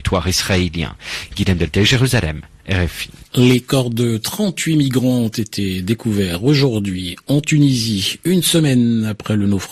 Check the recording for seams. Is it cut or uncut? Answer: uncut